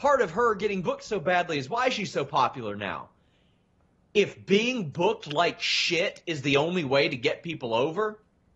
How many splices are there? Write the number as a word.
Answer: zero